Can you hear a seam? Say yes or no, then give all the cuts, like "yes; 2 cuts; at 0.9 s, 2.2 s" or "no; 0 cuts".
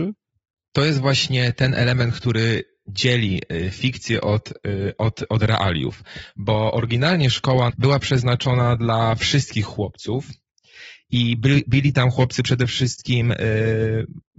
yes; 1 cut; at 7.7 s